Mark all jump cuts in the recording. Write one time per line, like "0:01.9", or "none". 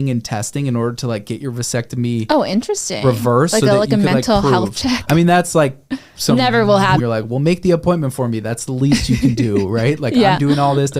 0:07.0